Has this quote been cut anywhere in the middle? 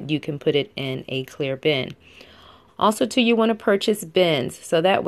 yes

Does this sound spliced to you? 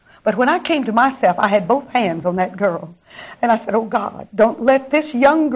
no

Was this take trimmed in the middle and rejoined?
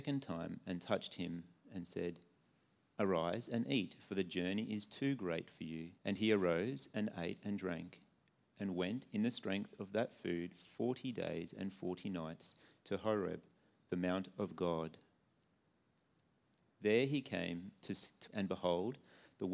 yes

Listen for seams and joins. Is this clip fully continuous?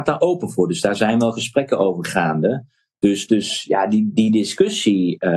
no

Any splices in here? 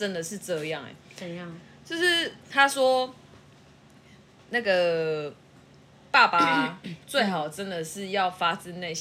no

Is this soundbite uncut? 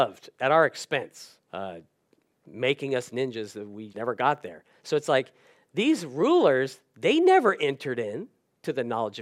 no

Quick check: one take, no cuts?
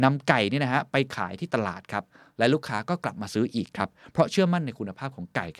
yes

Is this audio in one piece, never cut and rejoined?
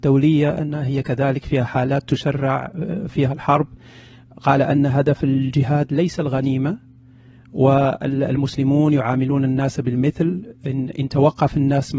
yes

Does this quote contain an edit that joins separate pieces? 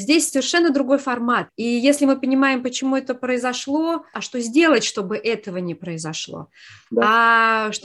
yes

